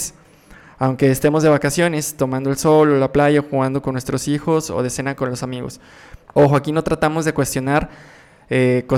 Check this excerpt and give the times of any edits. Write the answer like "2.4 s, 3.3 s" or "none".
6.2 s